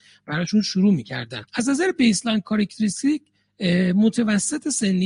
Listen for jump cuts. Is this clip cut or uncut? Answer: cut